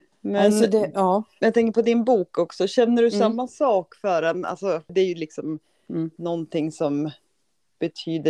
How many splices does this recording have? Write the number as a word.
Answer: one